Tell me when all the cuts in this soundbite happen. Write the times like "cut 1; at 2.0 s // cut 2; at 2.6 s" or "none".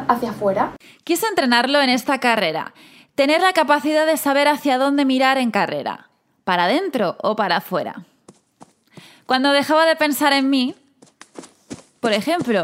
none